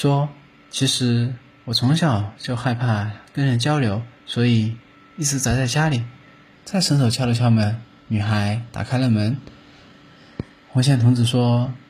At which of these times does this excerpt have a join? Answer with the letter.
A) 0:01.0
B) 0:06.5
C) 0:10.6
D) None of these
B